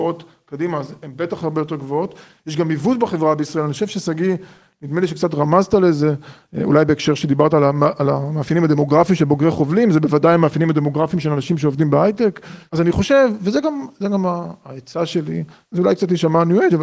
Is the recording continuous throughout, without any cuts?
yes; 0 cuts

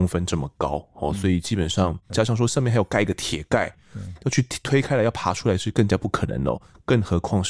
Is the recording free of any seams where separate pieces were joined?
no; 1 cut; at 2.1 s

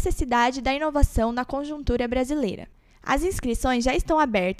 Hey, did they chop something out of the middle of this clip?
no; 0 cuts

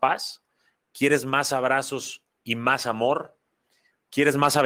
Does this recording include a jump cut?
no; 0 cuts

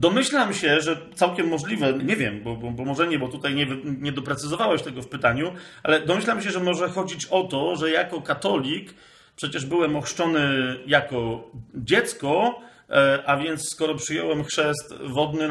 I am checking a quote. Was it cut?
yes; 1 cut; at 2.0 s

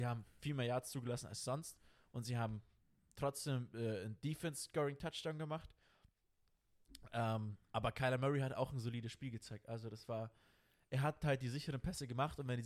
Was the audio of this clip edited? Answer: no; 0 cuts

